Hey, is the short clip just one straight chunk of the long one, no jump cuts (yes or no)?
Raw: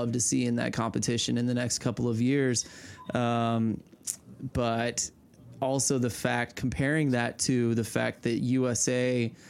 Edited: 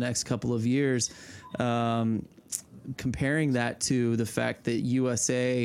no